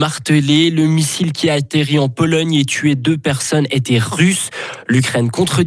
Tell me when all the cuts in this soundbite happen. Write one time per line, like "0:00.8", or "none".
none